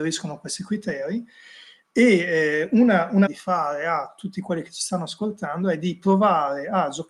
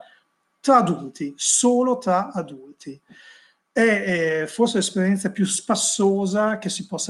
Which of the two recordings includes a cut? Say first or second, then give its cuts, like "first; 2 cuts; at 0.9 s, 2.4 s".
first; 1 cut; at 3.3 s